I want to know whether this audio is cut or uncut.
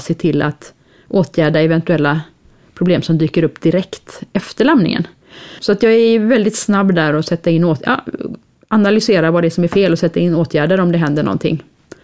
cut